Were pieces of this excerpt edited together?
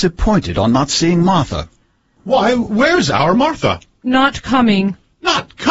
no; 0 cuts

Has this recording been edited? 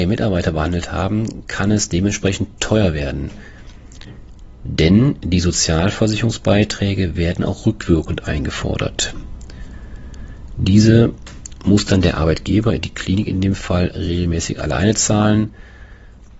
no; 0 cuts

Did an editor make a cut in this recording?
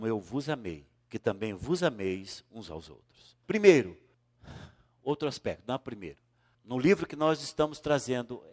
yes; 2 cuts; at 3.4 s, 6.5 s

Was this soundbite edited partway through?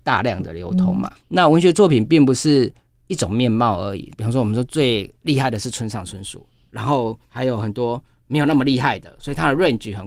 yes; 1 cut; at 1.2 s

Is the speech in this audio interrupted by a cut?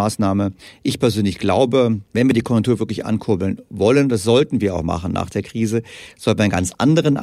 yes; 1 cut; at 2.1 s

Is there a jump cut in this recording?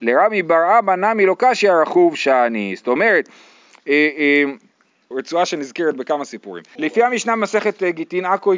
yes; 2 cuts; at 5.1 s, 6.8 s

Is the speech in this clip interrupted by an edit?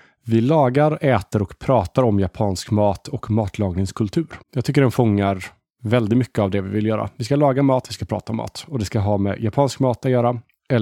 yes; 2 cuts; at 4.4 s, 7.8 s

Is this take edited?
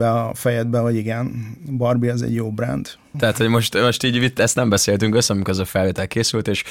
yes; 2 cuts; at 3.1 s, 5.3 s

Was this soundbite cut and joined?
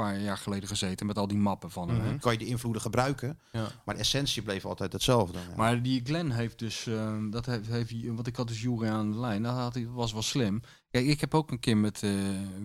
yes; 1 cut; at 2.2 s

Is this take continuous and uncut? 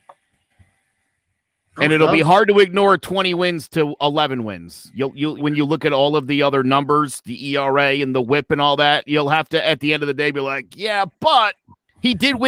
no; 1 cut; at 5.4 s

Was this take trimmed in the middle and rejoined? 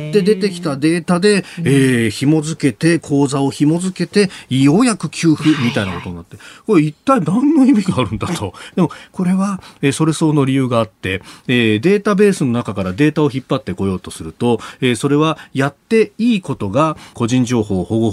yes; 2 cuts; at 8.7 s, 17.1 s

